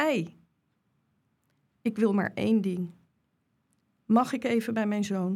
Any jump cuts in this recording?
no; 0 cuts

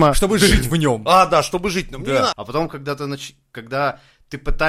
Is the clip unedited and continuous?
no; 1 cut; at 2.3 s

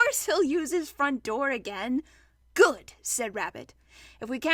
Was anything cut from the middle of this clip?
no; 0 cuts

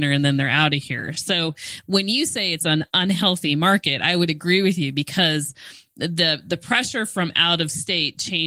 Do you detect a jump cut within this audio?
no; 0 cuts

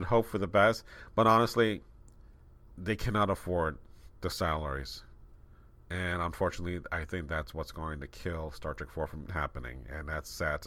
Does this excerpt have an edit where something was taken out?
yes; 1 cut; at 9.3 s

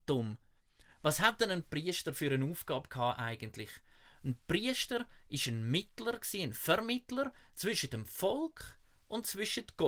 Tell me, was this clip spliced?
no; 0 cuts

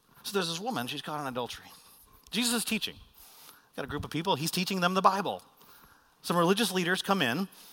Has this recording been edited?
no; 0 cuts

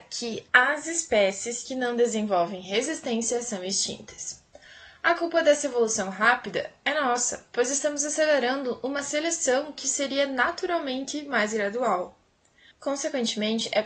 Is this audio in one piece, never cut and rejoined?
no; 1 cut; at 12.7 s

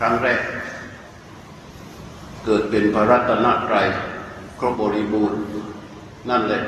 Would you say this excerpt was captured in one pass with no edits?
no; 1 cut; at 4.7 s

